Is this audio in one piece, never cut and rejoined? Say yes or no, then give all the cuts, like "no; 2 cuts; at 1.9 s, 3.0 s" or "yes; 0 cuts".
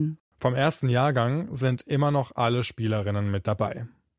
yes; 0 cuts